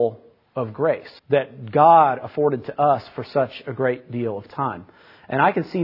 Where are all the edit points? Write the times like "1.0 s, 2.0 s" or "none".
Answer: 1.2 s